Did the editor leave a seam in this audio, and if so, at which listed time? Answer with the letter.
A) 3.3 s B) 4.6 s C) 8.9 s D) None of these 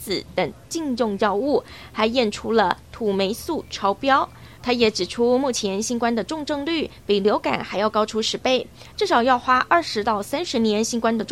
B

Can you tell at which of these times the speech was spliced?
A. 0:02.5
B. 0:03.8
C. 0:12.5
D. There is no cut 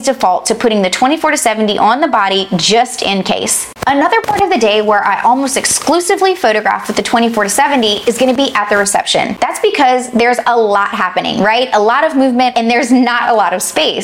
C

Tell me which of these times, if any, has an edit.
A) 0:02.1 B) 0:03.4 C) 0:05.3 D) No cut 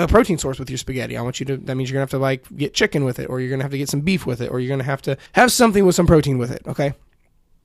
C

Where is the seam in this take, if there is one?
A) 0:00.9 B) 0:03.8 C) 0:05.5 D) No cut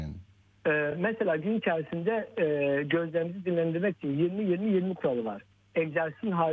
D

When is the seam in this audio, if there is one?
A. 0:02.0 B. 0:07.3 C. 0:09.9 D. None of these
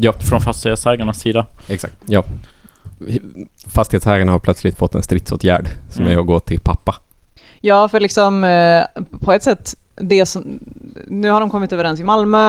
A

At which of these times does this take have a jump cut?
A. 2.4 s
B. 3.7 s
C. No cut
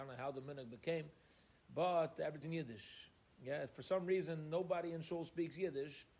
A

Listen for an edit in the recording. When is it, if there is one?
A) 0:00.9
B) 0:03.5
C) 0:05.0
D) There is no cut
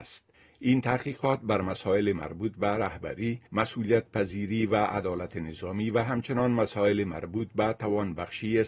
B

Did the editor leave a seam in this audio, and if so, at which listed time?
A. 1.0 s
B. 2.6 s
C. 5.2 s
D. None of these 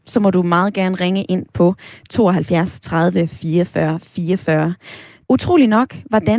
C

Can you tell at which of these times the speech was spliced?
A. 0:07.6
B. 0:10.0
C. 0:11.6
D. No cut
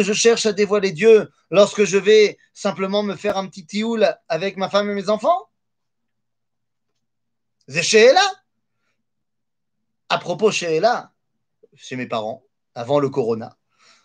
C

